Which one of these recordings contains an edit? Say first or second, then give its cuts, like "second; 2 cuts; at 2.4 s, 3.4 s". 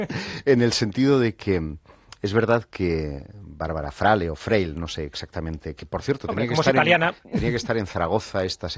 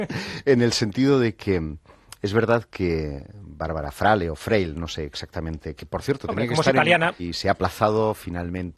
second; 1 cut; at 7.2 s